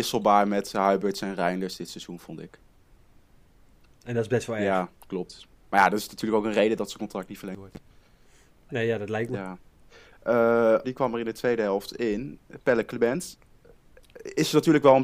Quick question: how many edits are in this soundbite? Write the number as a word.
one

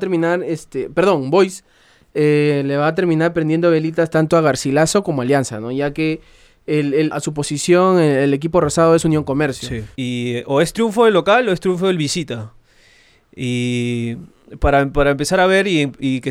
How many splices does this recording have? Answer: two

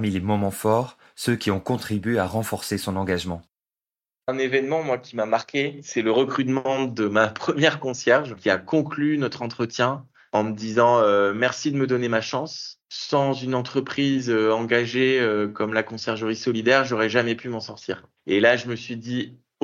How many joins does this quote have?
one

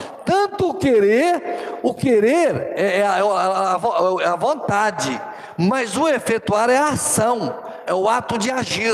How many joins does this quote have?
zero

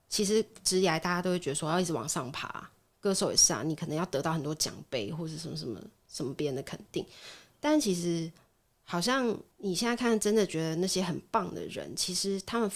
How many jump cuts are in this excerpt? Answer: one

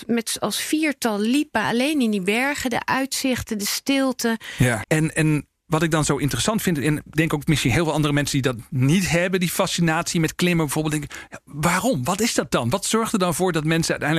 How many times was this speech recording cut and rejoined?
one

